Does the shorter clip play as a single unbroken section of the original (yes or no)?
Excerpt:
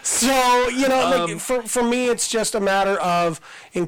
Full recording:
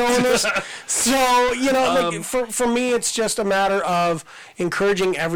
yes